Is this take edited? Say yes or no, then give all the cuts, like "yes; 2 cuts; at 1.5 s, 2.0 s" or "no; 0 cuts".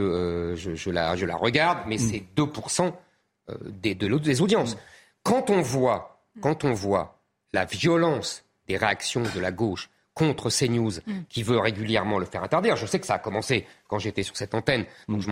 no; 0 cuts